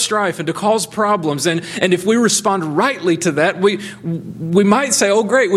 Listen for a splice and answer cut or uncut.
uncut